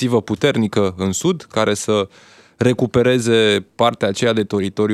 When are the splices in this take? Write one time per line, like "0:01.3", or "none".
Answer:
none